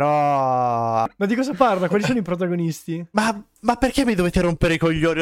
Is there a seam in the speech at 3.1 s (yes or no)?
no